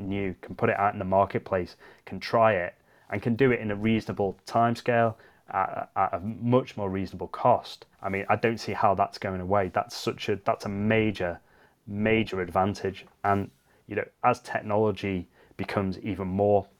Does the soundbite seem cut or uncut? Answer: cut